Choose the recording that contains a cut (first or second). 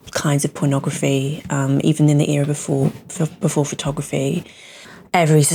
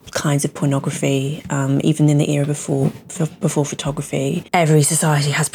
second